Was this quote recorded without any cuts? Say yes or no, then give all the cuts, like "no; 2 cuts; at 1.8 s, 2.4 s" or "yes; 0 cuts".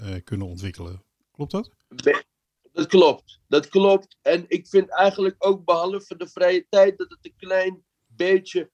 yes; 0 cuts